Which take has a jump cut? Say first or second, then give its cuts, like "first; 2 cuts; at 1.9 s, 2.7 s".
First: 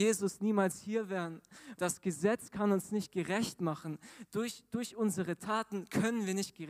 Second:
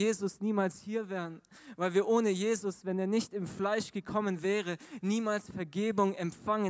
first; 1 cut; at 1.8 s